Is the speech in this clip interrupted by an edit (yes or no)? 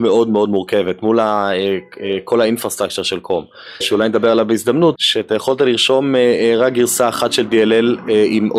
yes